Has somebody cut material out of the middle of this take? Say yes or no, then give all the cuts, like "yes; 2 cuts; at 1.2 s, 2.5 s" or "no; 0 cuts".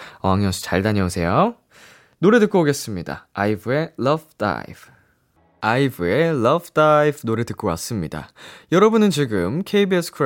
no; 0 cuts